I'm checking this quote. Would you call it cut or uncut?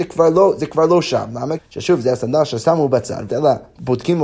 cut